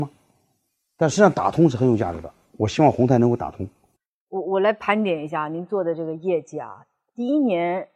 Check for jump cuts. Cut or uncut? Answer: uncut